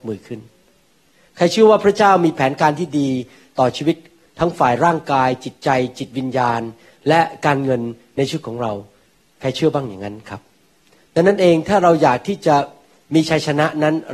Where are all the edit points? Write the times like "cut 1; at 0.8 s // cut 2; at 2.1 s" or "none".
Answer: none